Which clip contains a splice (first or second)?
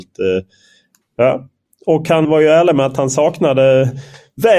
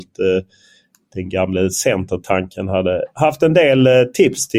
first